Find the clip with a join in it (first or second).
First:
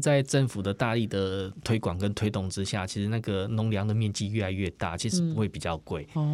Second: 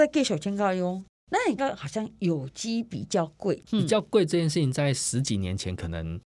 second